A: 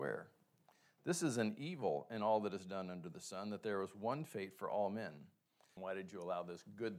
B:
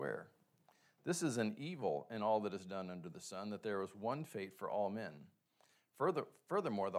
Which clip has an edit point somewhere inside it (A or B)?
A